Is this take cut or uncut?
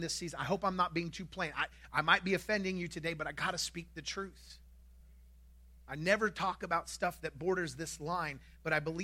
uncut